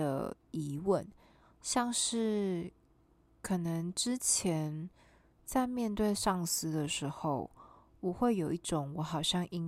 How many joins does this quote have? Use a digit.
0